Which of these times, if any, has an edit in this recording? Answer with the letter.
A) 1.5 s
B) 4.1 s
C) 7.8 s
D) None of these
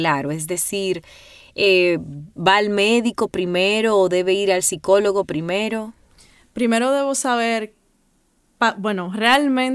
D